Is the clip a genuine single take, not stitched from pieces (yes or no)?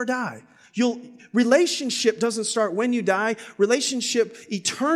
yes